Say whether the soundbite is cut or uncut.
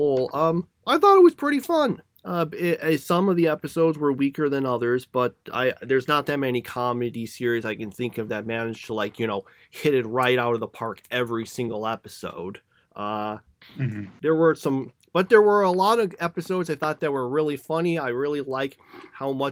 uncut